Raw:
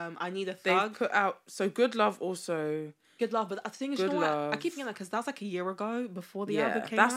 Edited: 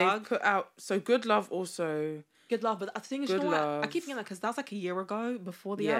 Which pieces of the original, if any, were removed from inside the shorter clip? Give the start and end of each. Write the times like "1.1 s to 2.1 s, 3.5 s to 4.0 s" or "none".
none